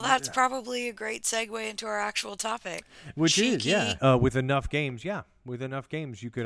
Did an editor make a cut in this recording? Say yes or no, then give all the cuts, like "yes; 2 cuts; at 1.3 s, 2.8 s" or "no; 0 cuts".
yes; 1 cut; at 4.0 s